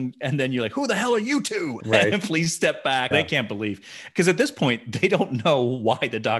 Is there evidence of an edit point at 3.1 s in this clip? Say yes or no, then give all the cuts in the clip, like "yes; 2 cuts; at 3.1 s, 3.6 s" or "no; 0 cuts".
yes; 2 cuts; at 1.8 s, 3.1 s